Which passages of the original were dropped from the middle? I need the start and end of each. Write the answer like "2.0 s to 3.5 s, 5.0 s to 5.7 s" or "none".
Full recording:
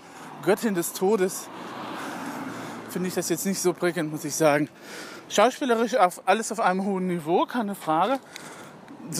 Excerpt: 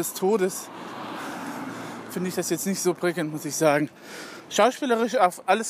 none